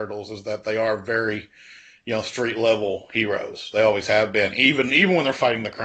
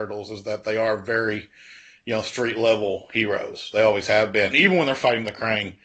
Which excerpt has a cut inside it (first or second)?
second